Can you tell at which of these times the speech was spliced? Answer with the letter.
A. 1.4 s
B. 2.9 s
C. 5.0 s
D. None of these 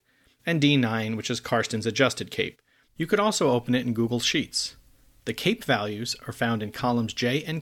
B